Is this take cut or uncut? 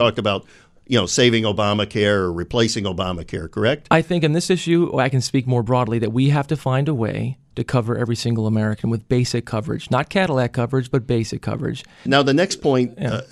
cut